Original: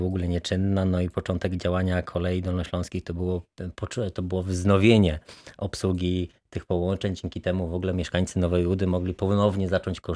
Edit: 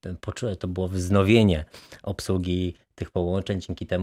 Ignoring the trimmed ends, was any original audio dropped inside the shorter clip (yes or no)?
no